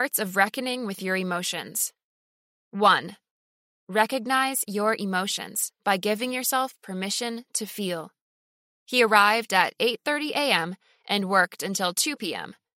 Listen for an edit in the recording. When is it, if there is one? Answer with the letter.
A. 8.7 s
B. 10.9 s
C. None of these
A